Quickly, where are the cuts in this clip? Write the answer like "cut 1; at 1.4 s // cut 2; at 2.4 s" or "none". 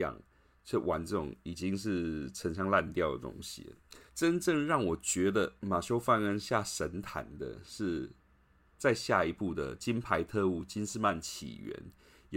cut 1; at 4.1 s